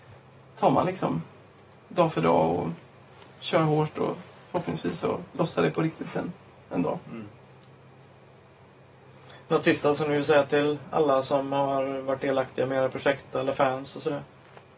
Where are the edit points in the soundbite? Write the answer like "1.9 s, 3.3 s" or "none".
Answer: none

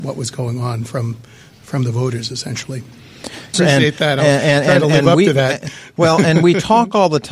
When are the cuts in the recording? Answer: 3.5 s

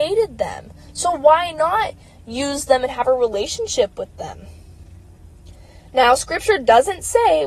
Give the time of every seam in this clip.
none

